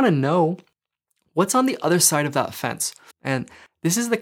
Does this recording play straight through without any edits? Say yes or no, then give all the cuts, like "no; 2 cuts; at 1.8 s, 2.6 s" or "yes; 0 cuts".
no; 1 cut; at 3.1 s